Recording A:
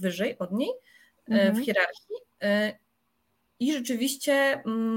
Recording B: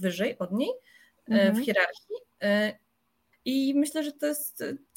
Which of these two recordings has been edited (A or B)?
B